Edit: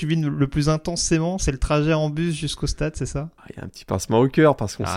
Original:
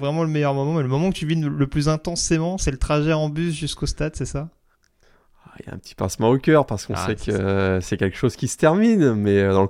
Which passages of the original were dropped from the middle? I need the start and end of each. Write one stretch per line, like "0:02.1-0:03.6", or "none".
0:04.6-0:05.5